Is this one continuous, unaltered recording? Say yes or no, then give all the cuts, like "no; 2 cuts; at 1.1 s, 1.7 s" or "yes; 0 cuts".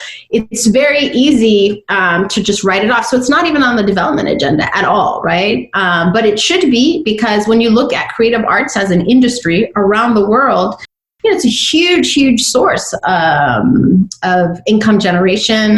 yes; 0 cuts